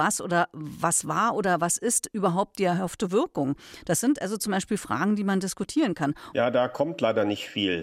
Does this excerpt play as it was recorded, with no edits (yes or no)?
no